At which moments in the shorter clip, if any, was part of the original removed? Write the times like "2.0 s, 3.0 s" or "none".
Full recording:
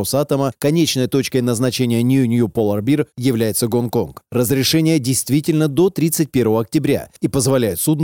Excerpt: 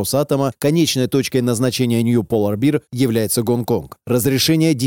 2.0 s